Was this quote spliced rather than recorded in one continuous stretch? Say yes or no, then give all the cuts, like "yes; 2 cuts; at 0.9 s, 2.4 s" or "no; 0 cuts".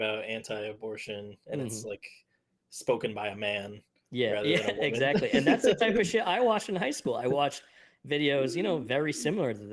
no; 0 cuts